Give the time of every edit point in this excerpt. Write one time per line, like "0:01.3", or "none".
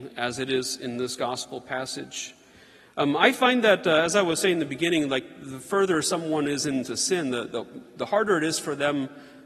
none